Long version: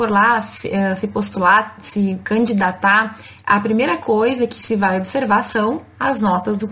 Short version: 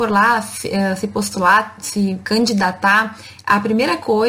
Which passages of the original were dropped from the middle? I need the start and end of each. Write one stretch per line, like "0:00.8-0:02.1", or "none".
none